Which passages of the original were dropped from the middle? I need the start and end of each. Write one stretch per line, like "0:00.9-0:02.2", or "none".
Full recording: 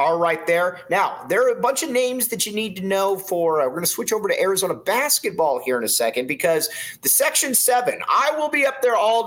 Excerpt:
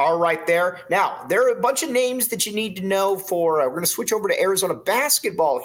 none